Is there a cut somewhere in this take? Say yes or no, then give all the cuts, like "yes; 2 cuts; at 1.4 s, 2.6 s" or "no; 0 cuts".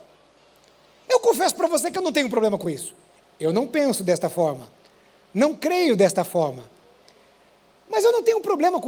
no; 0 cuts